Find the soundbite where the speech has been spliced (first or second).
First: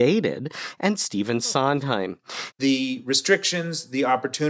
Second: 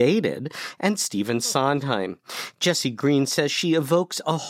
first